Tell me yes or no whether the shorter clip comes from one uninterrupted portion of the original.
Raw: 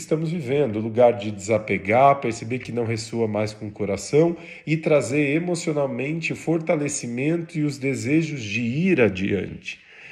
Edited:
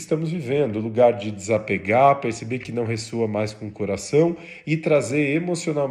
yes